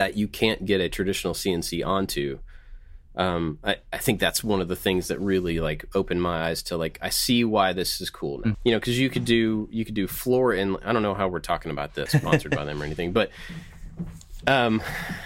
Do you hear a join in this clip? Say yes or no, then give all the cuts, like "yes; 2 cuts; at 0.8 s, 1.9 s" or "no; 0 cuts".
yes; 2 cuts; at 8.5 s, 12.1 s